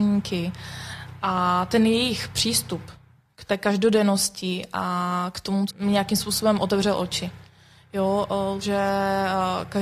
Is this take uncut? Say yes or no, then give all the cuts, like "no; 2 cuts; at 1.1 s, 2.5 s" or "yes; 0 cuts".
no; 2 cuts; at 5.7 s, 8.6 s